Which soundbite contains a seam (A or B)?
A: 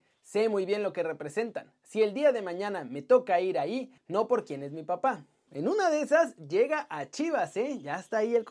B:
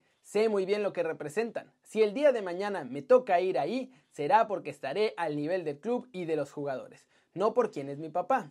A